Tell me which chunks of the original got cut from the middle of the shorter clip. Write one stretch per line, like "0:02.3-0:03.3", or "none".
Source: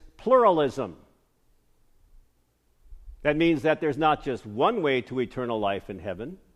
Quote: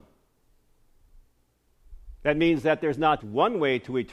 0:04.2-0:04.4